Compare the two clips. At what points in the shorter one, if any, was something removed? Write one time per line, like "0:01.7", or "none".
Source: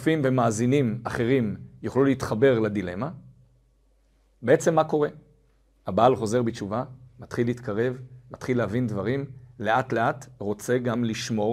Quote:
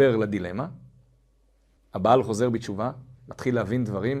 0:01.8
0:03.2